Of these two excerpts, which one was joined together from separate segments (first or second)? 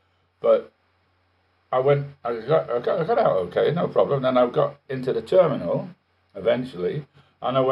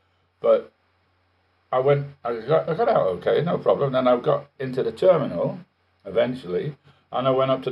second